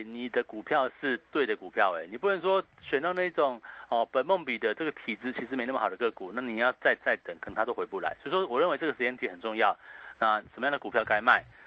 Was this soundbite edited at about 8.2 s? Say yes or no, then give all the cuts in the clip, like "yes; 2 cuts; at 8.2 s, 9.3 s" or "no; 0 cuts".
no; 1 cut; at 10.1 s